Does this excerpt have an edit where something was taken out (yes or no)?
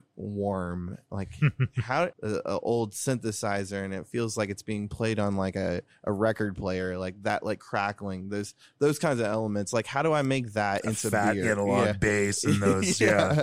yes